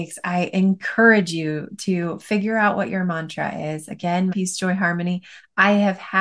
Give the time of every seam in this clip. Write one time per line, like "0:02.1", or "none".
0:04.3